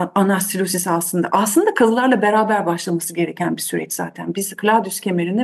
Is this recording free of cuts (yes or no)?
yes